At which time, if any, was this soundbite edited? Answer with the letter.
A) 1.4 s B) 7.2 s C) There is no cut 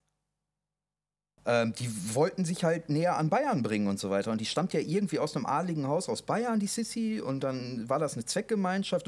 A